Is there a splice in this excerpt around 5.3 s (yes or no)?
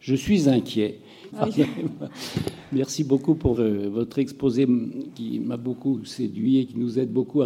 no